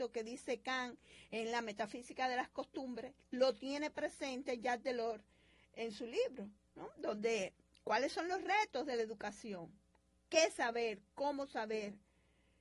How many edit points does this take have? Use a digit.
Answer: 0